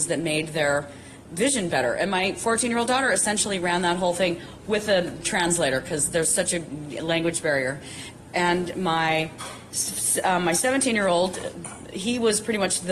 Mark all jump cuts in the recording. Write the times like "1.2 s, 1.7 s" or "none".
none